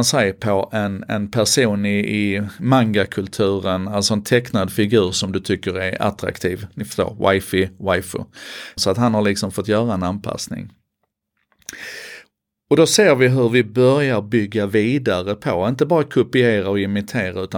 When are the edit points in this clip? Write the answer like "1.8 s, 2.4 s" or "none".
8.8 s